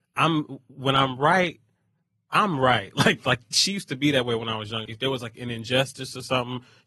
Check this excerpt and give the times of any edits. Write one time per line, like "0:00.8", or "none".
0:04.9